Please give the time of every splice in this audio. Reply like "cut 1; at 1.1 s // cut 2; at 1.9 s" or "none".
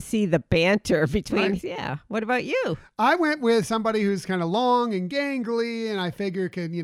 cut 1; at 1.6 s